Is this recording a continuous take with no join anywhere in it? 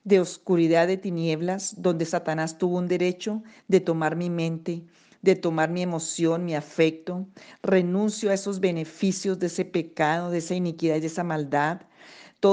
yes; 0 cuts

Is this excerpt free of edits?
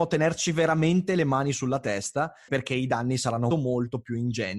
no; 2 cuts; at 2.5 s, 3.5 s

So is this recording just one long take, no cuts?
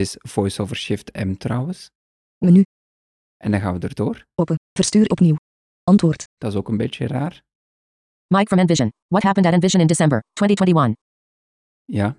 no; 2 cuts; at 4.6 s, 6.4 s

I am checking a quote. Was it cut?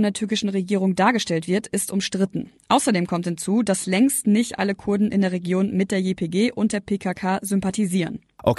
no; 0 cuts

